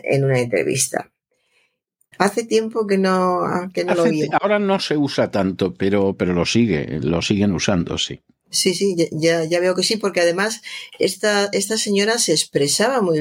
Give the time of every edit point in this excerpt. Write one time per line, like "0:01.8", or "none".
0:02.1